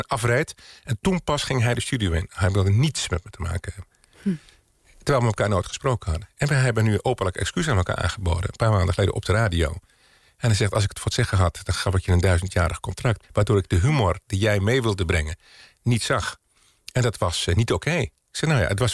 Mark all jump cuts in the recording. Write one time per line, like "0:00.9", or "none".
0:13.2